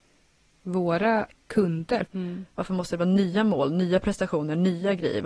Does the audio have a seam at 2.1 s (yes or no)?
yes